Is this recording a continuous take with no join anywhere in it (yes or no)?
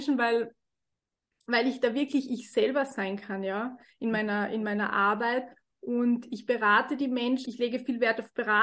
no